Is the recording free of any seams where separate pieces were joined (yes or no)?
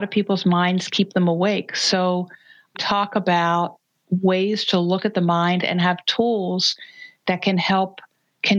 no